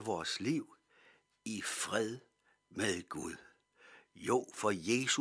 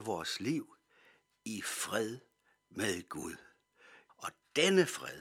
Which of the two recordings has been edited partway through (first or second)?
second